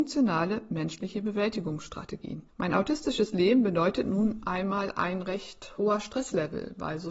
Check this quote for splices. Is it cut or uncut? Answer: cut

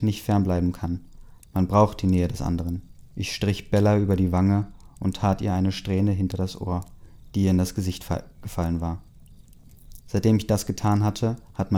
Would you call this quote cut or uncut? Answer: cut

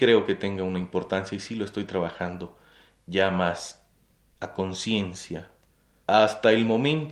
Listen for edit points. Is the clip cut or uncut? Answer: cut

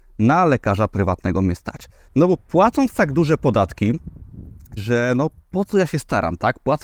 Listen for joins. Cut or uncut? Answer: cut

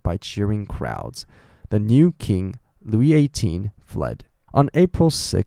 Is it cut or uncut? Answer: cut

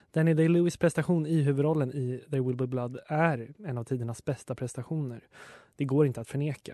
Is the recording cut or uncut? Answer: uncut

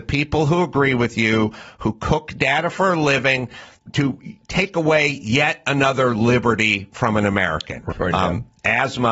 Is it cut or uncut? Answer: cut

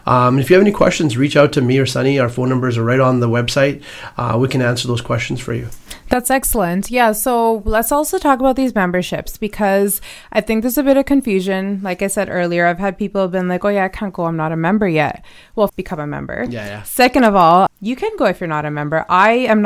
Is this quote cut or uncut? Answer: cut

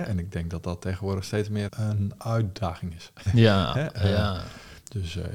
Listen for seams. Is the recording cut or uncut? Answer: cut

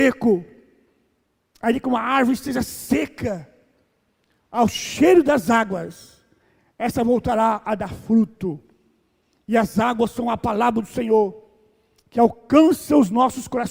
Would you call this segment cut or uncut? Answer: uncut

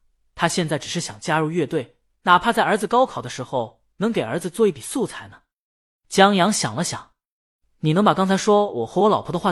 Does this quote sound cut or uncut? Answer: cut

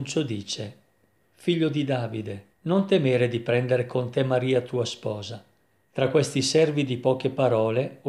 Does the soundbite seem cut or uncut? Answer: cut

